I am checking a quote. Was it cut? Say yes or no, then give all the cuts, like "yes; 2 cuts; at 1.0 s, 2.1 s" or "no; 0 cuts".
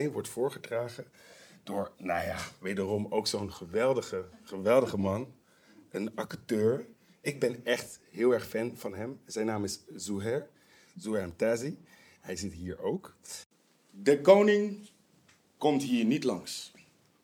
no; 0 cuts